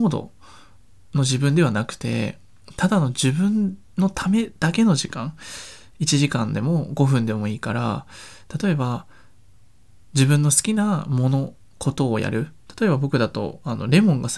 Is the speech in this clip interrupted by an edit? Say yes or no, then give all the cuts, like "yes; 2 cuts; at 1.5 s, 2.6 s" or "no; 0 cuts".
no; 0 cuts